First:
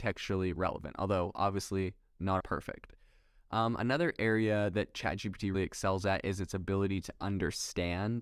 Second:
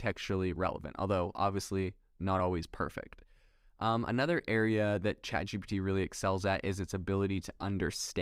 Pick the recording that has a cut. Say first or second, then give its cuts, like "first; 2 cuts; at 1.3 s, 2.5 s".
first; 2 cuts; at 2.4 s, 5.5 s